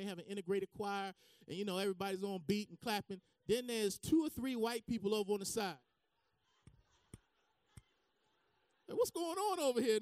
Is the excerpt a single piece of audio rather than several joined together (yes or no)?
yes